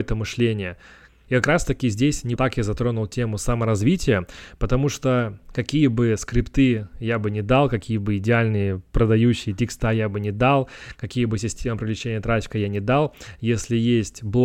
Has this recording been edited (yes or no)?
yes